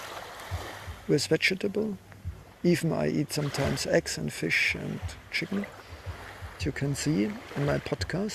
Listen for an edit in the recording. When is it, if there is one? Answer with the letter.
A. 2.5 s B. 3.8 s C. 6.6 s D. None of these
C